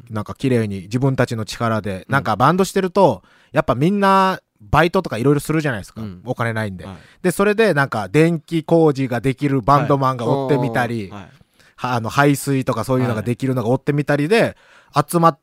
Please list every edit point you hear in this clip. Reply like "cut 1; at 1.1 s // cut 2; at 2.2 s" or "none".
none

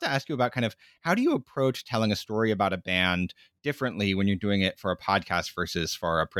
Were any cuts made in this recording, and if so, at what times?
none

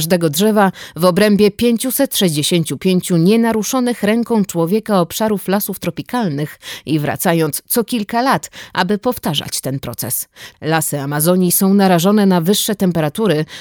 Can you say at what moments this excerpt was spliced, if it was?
cut 1; at 10.5 s

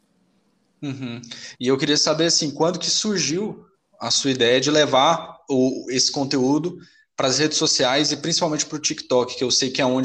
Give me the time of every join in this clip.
cut 1; at 1.5 s

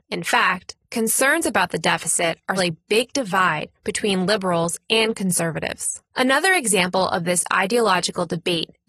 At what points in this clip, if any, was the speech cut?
cut 1; at 2.6 s

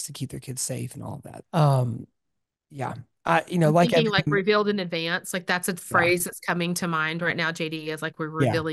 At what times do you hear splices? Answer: cut 1; at 1.4 s

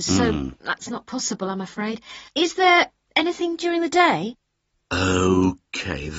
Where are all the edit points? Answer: cut 1; at 2.3 s

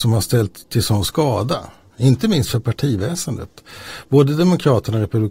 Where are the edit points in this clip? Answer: none

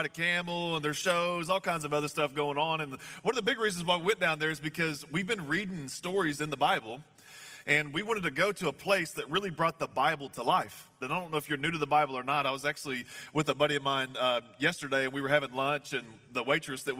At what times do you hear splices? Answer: cut 1; at 11.0 s

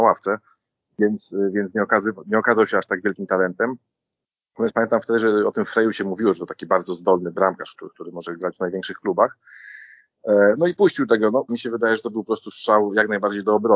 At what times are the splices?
cut 1; at 7.9 s // cut 2; at 11.5 s

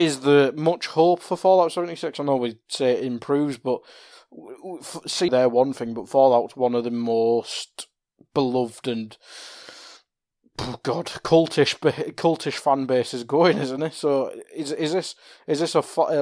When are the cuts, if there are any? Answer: cut 1; at 5.3 s

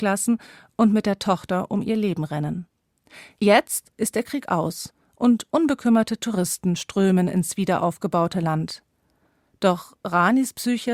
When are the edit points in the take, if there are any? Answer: cut 1; at 3.9 s

